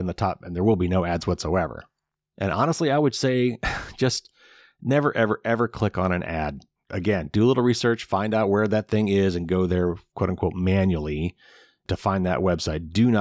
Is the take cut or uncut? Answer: cut